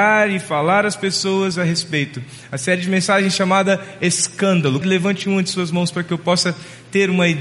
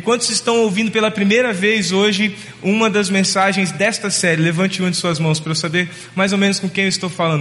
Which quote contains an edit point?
first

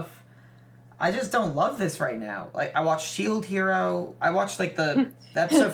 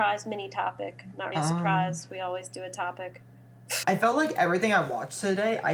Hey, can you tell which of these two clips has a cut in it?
second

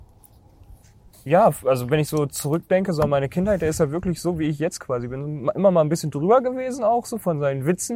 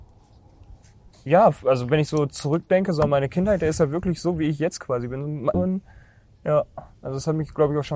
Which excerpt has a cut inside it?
second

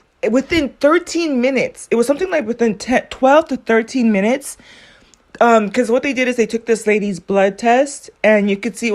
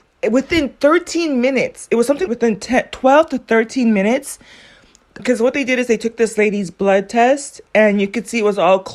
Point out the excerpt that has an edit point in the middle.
second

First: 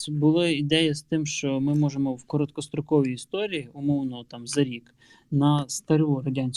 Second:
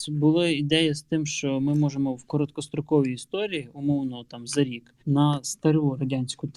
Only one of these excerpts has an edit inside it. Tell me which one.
second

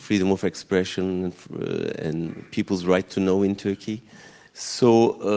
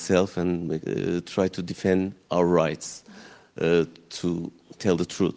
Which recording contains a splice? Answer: first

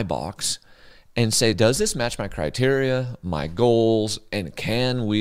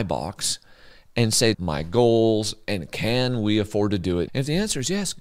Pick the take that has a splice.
second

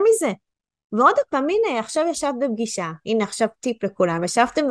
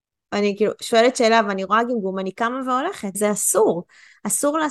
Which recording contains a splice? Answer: second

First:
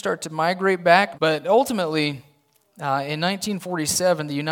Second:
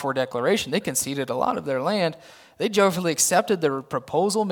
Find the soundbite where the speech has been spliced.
first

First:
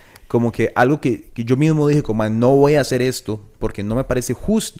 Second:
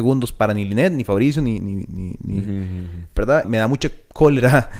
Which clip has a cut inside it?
second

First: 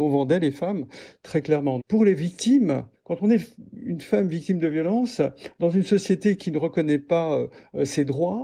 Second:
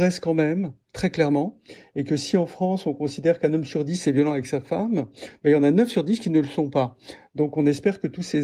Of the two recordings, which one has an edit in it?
first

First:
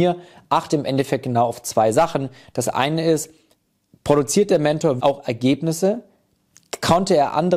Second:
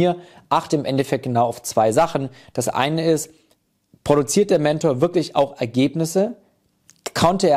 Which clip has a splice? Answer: first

